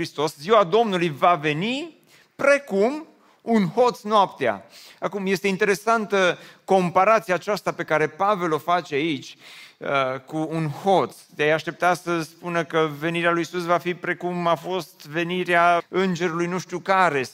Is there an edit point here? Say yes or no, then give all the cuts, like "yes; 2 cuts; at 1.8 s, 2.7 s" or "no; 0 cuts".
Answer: yes; 1 cut; at 15.8 s